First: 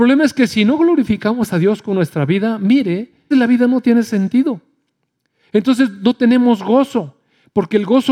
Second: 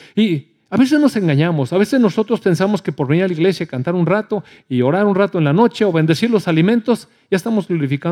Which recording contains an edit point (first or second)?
first